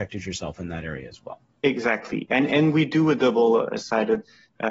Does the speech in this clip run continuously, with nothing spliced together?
yes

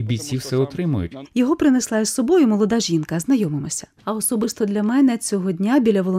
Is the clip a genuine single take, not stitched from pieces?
no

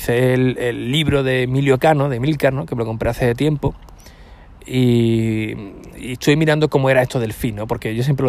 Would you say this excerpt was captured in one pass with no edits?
yes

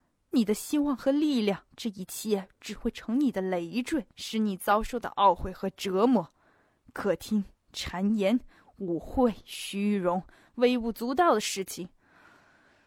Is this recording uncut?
no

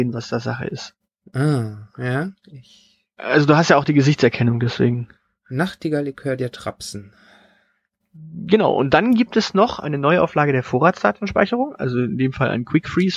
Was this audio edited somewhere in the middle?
no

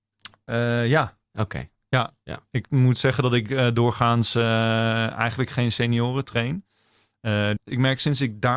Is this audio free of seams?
no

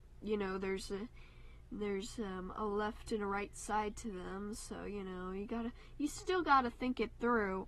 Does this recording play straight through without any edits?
yes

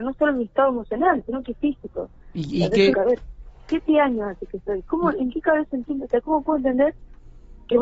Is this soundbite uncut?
no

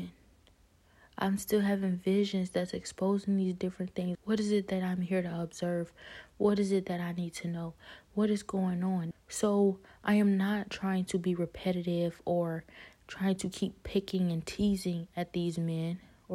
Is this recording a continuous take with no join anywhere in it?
no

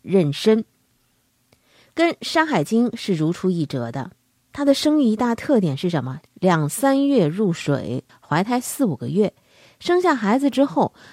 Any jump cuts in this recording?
yes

